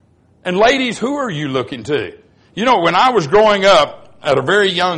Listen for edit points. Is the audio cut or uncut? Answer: uncut